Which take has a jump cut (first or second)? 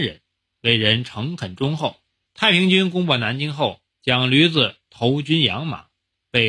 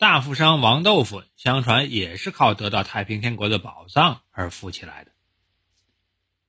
first